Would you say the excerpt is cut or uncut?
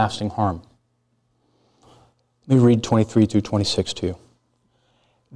uncut